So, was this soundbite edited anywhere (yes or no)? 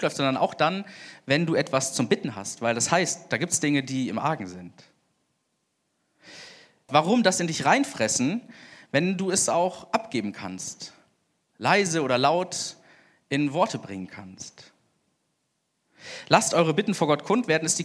yes